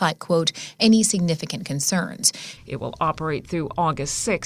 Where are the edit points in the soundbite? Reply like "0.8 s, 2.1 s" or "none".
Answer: 2.6 s